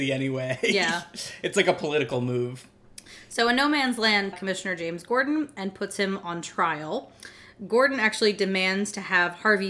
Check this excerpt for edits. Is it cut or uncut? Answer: cut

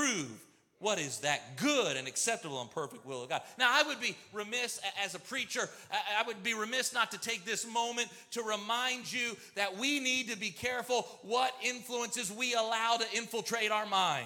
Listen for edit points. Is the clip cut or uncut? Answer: uncut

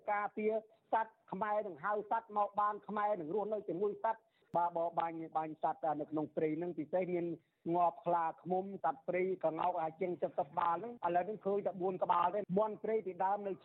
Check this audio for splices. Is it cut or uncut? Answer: cut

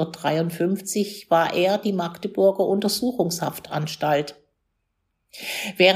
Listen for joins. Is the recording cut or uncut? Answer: uncut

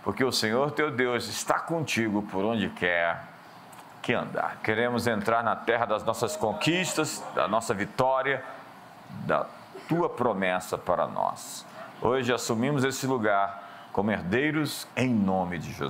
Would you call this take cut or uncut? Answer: cut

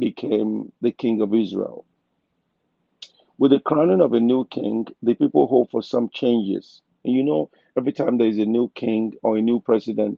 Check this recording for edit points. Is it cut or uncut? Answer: cut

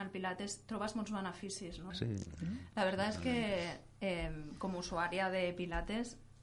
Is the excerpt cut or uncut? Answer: cut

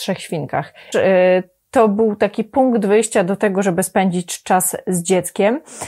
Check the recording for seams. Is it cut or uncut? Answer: cut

